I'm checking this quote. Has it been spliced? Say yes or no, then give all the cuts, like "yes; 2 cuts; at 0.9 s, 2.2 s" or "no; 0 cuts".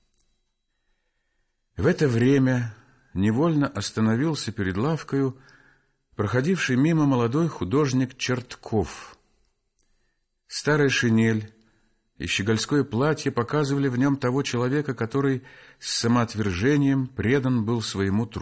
no; 0 cuts